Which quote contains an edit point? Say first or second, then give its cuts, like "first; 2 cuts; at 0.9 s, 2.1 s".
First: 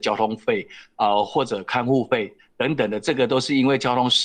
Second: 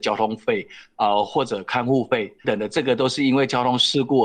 second; 1 cut; at 2.4 s